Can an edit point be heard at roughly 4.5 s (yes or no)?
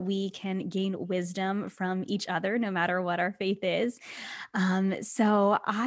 no